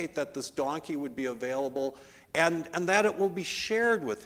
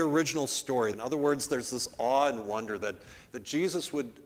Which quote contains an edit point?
second; 1 cut; at 0.9 s

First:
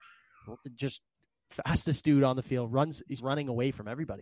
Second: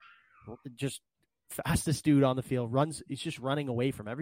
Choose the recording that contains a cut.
first; 1 cut; at 3.2 s

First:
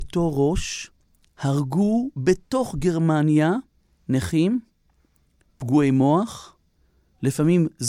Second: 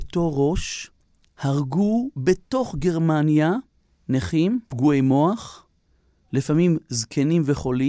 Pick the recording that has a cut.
second; 1 cut; at 4.7 s

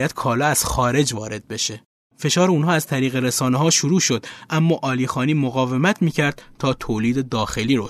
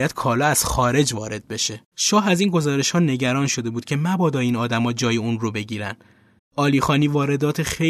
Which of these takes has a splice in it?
second; 2 cuts; at 1.9 s, 6.4 s

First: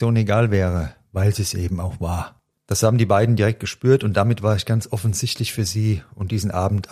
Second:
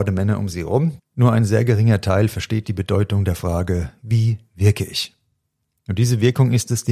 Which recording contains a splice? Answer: second; 2 cuts; at 1.0 s, 2.6 s

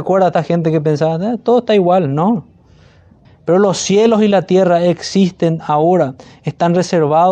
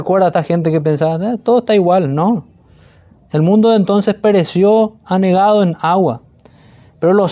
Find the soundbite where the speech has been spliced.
first; 1 cut; at 3.3 s

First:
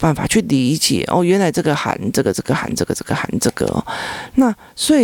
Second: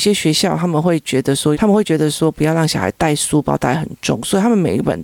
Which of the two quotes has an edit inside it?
second; 1 cut; at 1.5 s

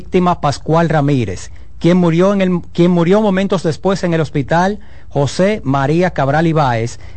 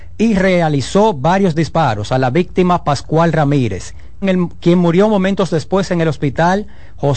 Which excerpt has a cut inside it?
second; 1 cut; at 4.2 s

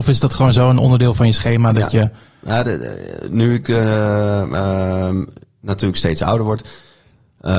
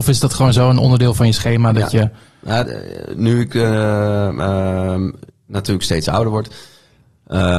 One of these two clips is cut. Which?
second; 1 cut; at 2.6 s

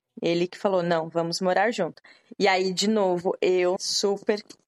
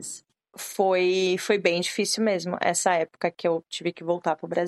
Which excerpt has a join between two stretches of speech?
first; 1 cut; at 3.8 s

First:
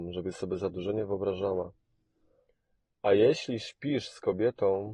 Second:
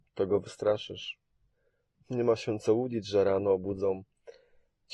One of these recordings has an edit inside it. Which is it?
second; 1 cut; at 1.9 s

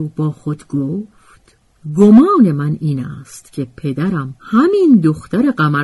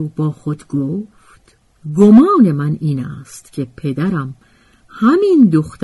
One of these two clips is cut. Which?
first; 1 cut; at 4.4 s

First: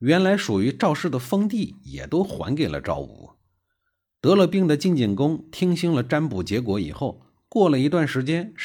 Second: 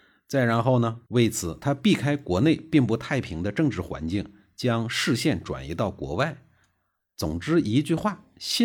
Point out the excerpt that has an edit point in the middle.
second; 1 cut; at 1.1 s

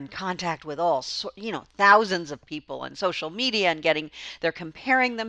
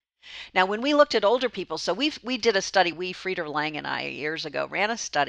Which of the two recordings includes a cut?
second; 1 cut; at 2.9 s

